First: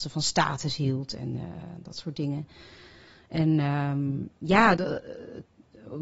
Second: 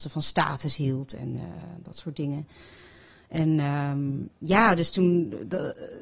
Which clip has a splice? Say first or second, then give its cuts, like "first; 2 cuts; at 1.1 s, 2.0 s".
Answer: first; 1 cut; at 4.8 s